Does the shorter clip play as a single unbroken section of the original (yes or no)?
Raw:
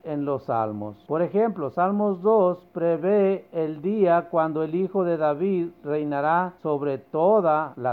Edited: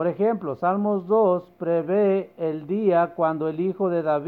yes